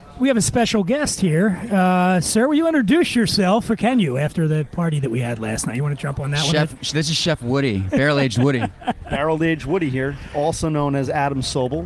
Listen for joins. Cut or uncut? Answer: uncut